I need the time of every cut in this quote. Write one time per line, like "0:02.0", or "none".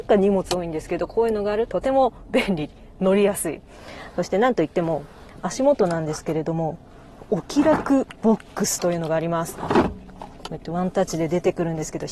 0:01.7